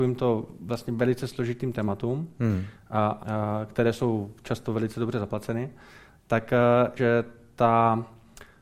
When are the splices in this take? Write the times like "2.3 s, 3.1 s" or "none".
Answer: 3.2 s, 7.0 s